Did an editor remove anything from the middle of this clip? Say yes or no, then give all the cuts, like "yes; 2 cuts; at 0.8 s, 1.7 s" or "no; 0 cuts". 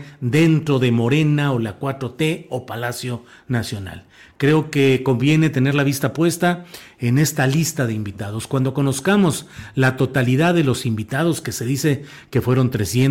no; 0 cuts